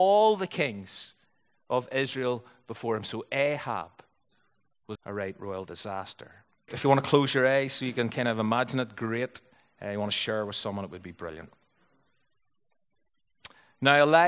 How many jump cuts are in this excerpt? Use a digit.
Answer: 2